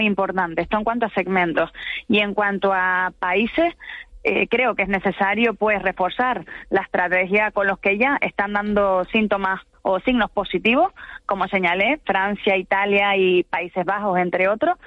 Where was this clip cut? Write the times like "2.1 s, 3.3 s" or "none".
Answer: none